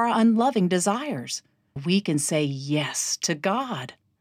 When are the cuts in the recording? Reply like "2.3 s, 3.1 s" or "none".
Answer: 1.8 s